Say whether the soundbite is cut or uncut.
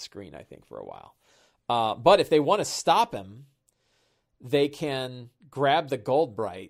uncut